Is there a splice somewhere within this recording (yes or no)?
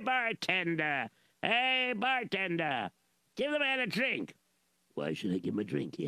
yes